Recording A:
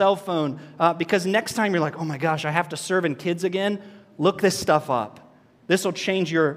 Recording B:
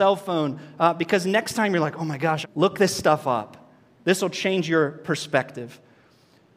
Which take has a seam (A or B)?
B